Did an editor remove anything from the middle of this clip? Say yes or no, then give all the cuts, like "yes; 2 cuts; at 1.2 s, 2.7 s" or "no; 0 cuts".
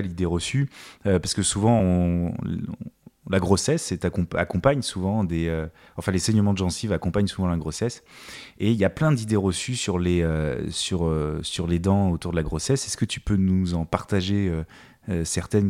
no; 0 cuts